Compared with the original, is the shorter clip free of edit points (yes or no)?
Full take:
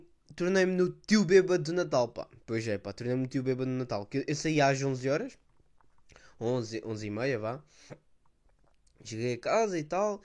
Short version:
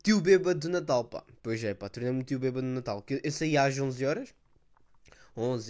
yes